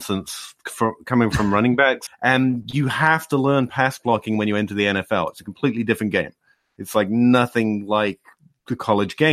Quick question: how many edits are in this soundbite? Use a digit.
1